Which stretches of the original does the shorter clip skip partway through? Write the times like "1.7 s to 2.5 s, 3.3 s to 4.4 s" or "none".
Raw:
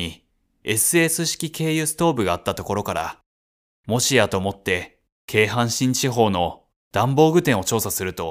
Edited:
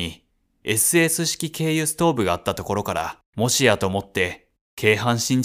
3.3 s to 3.8 s